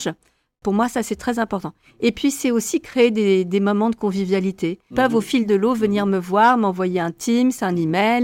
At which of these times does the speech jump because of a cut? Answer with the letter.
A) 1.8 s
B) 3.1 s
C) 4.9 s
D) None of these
C